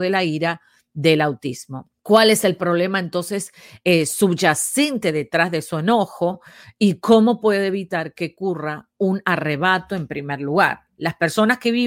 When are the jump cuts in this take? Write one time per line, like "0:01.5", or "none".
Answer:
0:02.0